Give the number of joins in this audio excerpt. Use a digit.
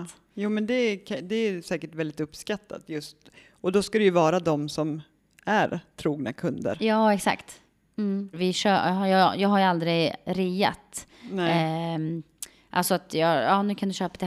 1